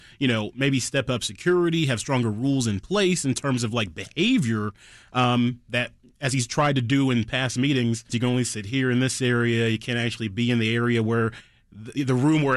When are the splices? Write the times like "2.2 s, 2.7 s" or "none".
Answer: 8.1 s